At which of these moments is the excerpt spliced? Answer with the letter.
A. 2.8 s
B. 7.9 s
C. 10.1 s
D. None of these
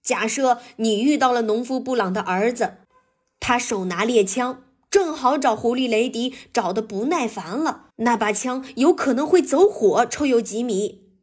B